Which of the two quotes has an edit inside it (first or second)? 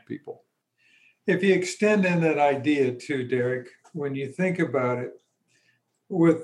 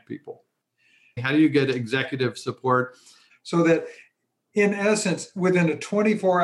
second